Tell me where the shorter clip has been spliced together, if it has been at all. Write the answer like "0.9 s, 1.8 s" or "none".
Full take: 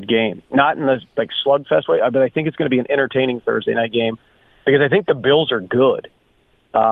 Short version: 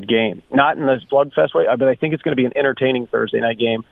1.1 s